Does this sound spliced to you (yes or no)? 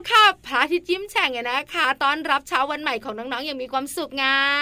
no